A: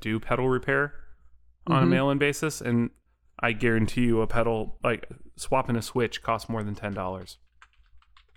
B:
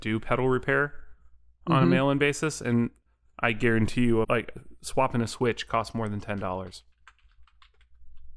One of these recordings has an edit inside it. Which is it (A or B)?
B